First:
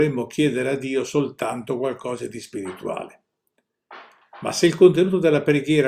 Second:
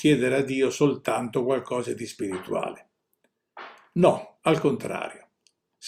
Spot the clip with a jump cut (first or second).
first